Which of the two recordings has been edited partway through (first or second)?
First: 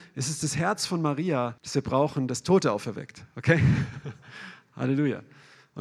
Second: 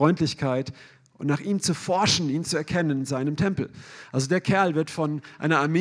first